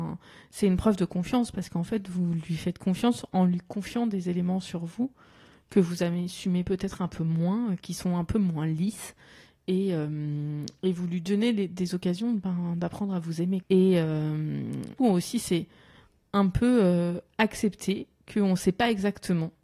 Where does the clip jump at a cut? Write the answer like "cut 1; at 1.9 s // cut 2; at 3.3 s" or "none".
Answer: cut 1; at 13.6 s // cut 2; at 15.0 s